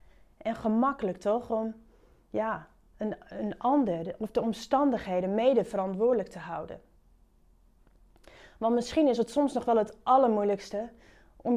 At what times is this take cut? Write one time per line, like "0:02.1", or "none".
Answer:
none